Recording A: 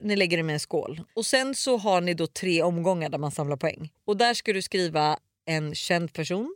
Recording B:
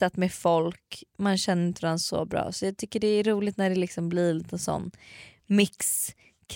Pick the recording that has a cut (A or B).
A